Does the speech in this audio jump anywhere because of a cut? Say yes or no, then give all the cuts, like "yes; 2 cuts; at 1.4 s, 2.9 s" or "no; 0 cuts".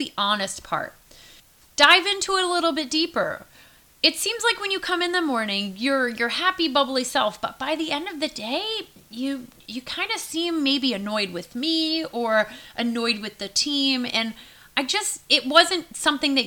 no; 0 cuts